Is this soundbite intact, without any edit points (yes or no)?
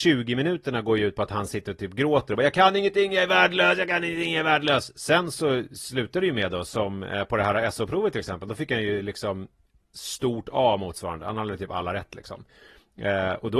yes